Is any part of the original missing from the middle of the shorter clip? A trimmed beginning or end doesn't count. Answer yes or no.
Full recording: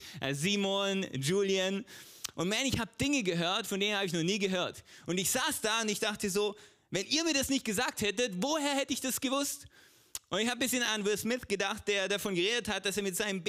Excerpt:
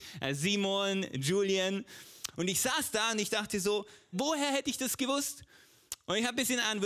yes